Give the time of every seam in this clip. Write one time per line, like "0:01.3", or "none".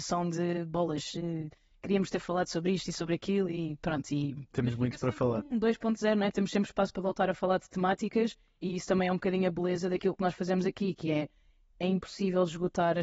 none